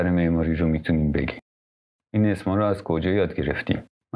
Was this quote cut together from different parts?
no; 0 cuts

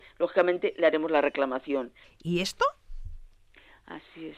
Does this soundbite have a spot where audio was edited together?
yes; 1 cut; at 2.0 s

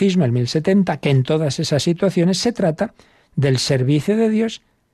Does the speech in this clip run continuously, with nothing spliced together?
yes; 0 cuts

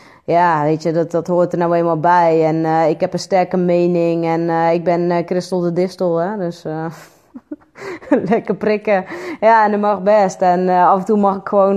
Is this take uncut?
yes; 0 cuts

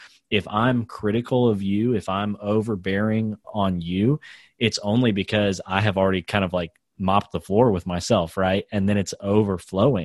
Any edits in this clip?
yes; 1 cut; at 3.4 s

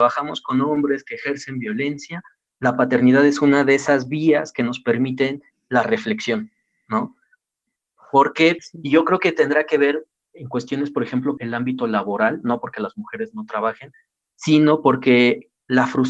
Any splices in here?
yes; 2 cuts; at 8.6 s, 11.4 s

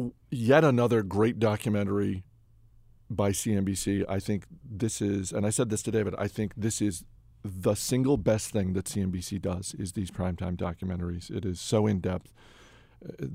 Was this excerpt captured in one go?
yes; 0 cuts

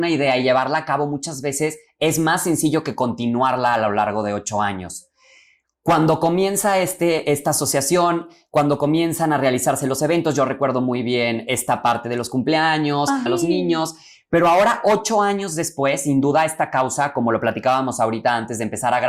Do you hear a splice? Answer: yes; 1 cut; at 13.3 s

